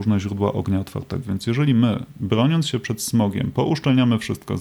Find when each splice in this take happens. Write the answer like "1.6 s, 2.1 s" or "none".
1.2 s